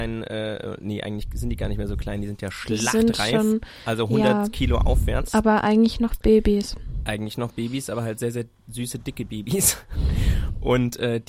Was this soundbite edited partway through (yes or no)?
no